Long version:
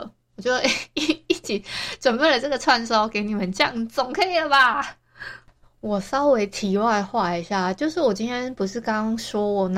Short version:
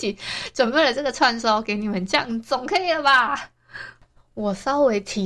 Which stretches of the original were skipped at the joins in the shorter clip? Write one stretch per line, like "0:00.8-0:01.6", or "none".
none